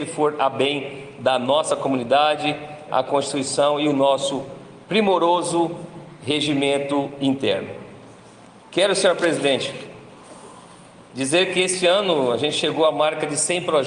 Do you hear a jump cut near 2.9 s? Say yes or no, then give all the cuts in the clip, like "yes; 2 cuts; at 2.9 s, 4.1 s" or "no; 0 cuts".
yes; 1 cut; at 2.9 s